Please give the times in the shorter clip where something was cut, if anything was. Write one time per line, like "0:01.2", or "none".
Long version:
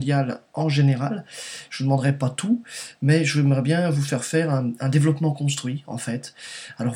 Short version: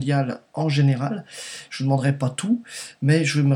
none